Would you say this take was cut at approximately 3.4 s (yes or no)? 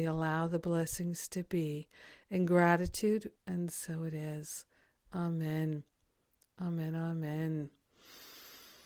yes